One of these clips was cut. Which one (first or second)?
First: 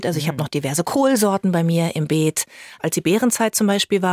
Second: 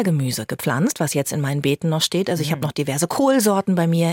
first